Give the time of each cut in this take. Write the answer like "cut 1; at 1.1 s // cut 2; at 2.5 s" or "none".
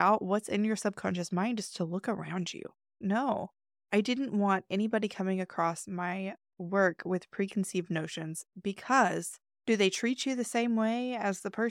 cut 1; at 3.0 s // cut 2; at 9.6 s